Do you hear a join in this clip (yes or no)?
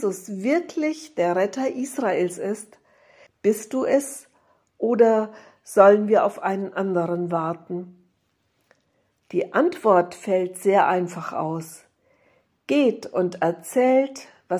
yes